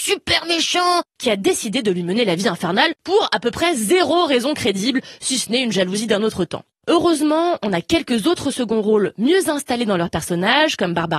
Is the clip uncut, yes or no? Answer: no